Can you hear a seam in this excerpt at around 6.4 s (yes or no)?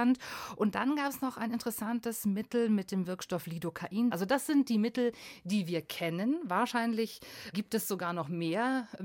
no